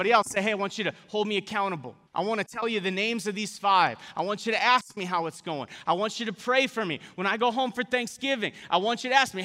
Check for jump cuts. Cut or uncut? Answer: cut